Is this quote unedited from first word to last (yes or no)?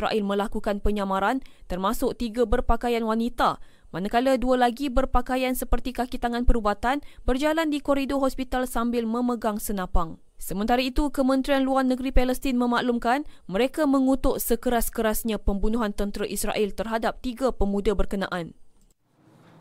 no